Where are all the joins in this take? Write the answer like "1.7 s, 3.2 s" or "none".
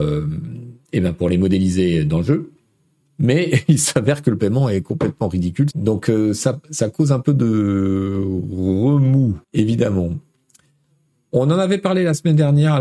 5.7 s, 9.4 s